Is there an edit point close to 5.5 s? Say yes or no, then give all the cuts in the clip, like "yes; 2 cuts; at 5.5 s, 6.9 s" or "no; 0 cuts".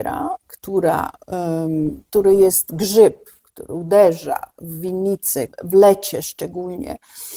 yes; 1 cut; at 5.5 s